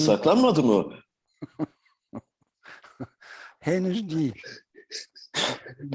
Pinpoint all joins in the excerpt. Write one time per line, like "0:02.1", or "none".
none